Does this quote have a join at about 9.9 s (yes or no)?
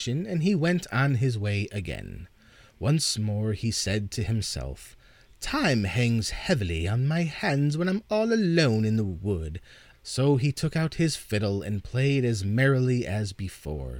yes